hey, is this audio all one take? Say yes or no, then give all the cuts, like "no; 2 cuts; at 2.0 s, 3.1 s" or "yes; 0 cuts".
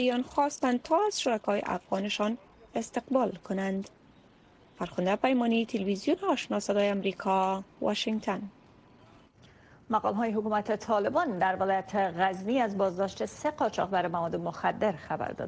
no; 1 cut; at 7.7 s